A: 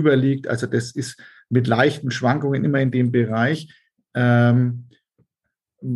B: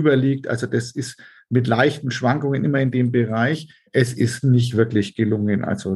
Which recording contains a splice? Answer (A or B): B